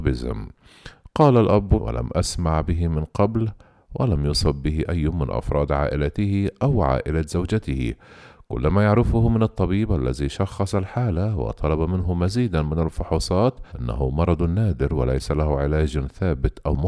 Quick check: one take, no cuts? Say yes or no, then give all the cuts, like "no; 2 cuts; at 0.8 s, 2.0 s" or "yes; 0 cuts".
no; 2 cuts; at 1.8 s, 13.7 s